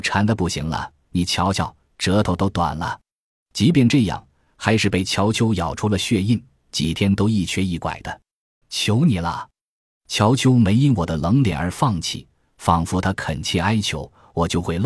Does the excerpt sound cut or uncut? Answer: cut